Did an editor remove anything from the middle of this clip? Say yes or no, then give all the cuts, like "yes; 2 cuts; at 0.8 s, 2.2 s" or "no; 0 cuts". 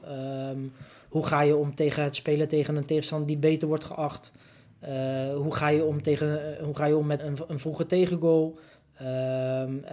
yes; 1 cut; at 7.2 s